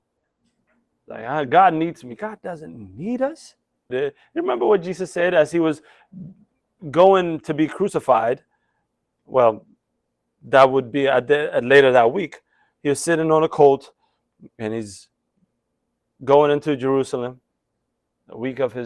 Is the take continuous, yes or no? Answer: no